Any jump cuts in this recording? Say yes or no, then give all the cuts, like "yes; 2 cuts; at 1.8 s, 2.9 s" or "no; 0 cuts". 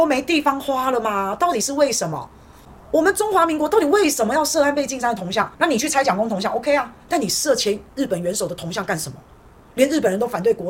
yes; 1 cut; at 5.6 s